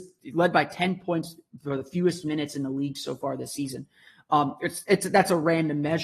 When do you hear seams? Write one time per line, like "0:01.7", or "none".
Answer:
none